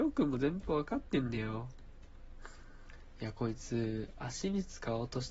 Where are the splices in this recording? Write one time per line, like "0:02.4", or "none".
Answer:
none